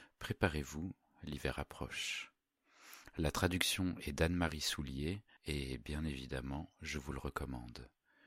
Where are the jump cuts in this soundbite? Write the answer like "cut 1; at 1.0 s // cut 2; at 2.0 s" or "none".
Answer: cut 1; at 5.4 s